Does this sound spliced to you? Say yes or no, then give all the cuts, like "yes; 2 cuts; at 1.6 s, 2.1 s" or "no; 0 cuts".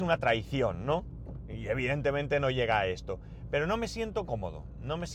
no; 0 cuts